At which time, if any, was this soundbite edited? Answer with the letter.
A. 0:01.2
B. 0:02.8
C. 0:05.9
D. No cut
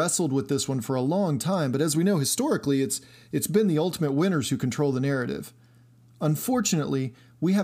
D